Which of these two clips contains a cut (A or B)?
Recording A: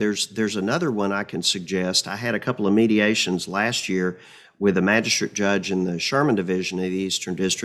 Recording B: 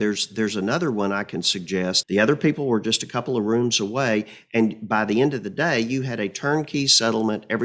B